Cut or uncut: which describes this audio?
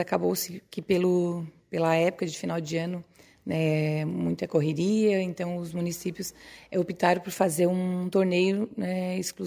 uncut